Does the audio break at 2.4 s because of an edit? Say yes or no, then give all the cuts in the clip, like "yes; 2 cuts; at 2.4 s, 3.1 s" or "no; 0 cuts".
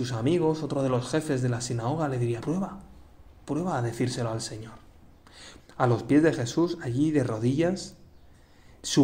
yes; 2 cuts; at 2.4 s, 5.6 s